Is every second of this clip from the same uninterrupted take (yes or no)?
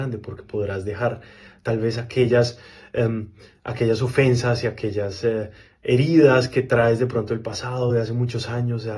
yes